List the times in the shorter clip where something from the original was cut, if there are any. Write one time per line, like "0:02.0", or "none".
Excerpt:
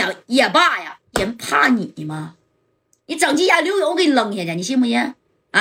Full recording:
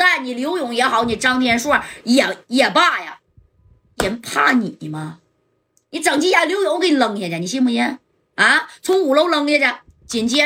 0:01.1